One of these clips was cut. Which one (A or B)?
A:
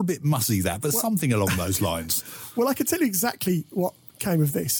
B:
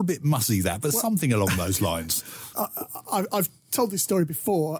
B